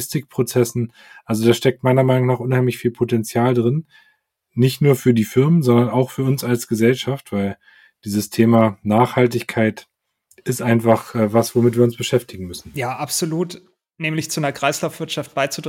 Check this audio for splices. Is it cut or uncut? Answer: uncut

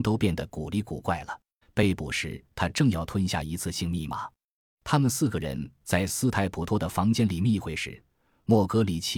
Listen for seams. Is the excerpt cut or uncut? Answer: cut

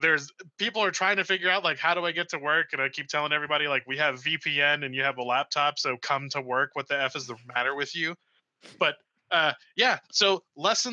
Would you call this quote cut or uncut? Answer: uncut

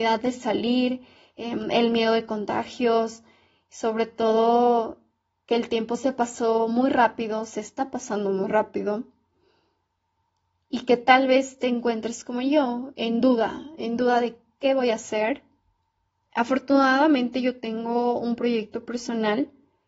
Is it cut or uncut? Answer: uncut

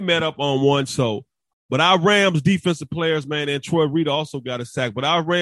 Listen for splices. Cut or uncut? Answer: cut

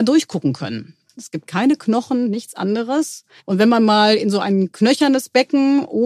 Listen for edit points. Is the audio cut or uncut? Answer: cut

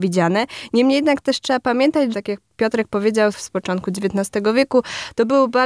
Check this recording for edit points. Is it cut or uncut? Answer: cut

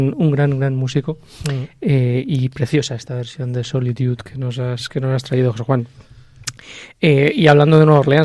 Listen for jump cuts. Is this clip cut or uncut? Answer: uncut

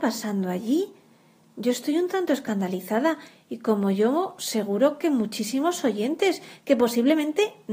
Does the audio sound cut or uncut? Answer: uncut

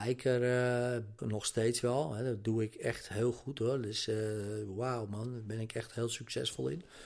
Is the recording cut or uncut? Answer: cut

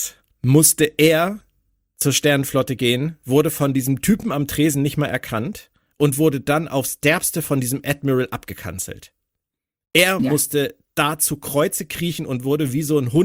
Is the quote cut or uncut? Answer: uncut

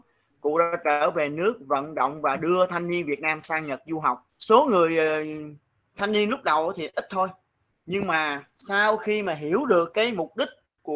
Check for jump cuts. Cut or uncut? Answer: cut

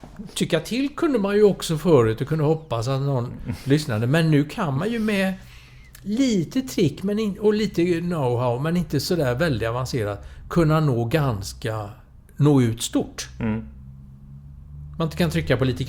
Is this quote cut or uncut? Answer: uncut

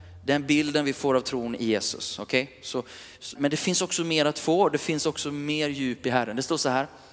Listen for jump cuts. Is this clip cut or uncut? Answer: cut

